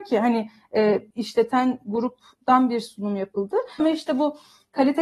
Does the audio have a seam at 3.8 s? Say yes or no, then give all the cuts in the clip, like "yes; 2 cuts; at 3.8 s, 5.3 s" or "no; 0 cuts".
yes; 2 cuts; at 1.1 s, 3.8 s